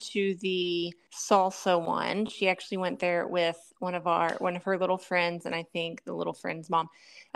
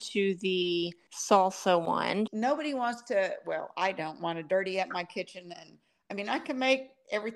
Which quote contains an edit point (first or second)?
second